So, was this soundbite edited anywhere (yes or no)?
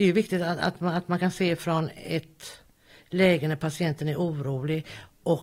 no